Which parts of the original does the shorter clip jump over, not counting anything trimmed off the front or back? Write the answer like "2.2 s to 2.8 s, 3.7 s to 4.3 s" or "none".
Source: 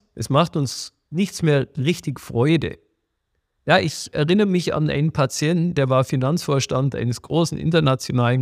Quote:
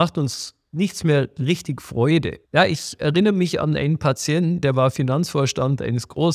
2.8 s to 3.6 s